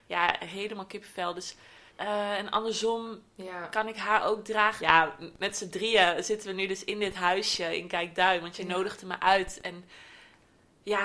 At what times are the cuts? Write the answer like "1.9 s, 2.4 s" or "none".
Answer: 1.9 s, 4.8 s